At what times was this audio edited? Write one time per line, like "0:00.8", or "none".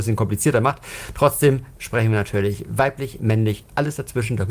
0:01.8